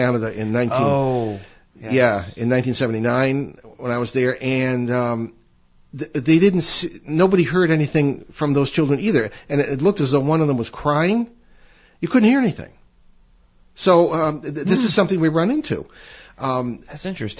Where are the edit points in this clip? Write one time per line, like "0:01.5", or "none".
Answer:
none